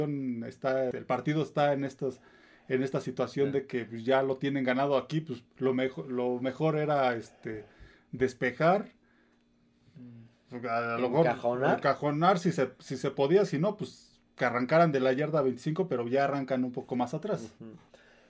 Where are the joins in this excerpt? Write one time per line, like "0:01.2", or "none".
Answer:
0:00.9